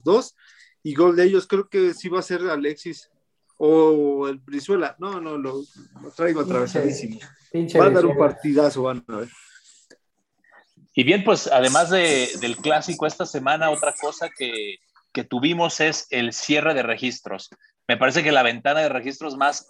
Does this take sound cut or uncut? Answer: uncut